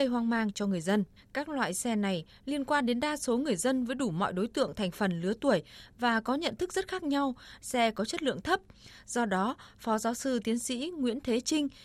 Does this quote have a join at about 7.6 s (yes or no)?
yes